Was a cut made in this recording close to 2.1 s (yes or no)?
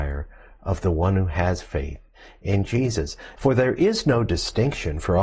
no